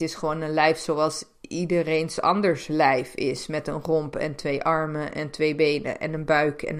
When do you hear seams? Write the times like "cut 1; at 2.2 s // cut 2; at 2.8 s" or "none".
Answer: none

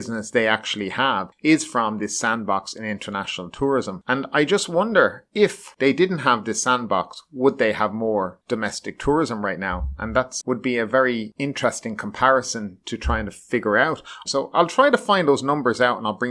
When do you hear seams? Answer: cut 1; at 10.4 s // cut 2; at 14.3 s

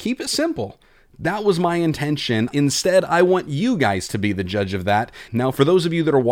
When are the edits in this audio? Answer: cut 1; at 2.5 s // cut 2; at 5.3 s

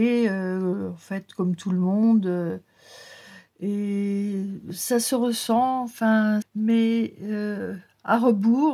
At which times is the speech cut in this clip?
cut 1; at 6.4 s

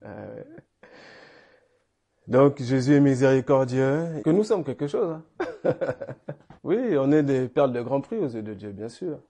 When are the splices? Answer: cut 1; at 4.2 s // cut 2; at 6.6 s

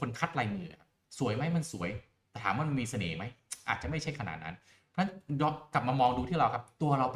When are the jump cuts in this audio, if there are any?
none

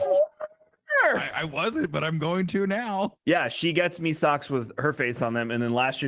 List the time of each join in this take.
cut 1; at 3.2 s

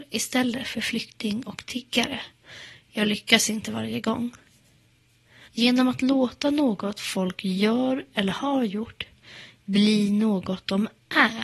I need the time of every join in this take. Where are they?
cut 1; at 5.5 s

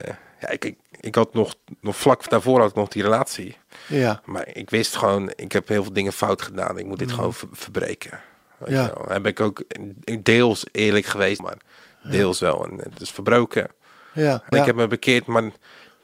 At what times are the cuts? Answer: cut 1; at 1.0 s // cut 2; at 11.4 s // cut 3; at 14.5 s

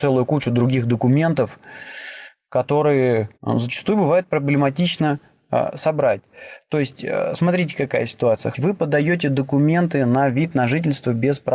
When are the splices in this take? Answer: cut 1; at 3.3 s // cut 2; at 8.5 s

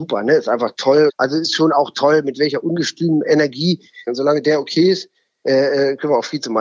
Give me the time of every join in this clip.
cut 1; at 1.1 s // cut 2; at 4.1 s

